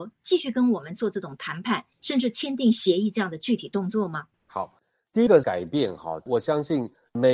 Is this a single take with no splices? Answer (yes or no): no